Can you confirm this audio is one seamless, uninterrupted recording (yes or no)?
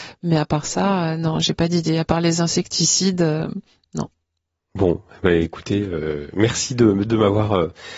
yes